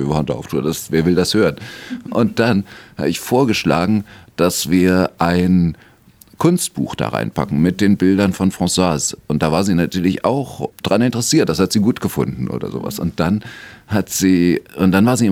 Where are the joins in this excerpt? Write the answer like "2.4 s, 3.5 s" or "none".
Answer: none